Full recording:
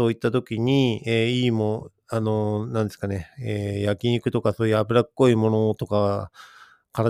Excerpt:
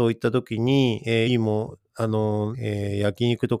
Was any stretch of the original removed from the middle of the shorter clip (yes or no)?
yes